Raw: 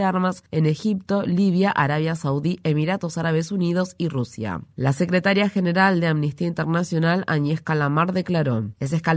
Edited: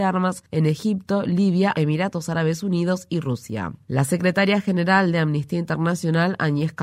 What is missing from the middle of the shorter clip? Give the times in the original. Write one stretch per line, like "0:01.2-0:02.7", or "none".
0:01.7-0:02.6